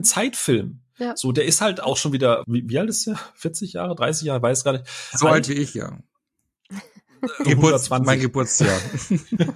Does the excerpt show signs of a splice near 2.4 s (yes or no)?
yes